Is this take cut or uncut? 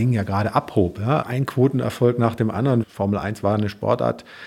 cut